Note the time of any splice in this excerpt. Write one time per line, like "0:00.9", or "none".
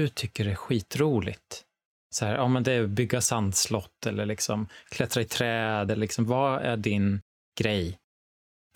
none